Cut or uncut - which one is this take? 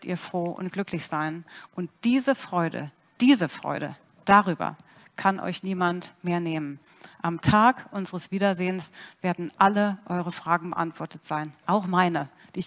uncut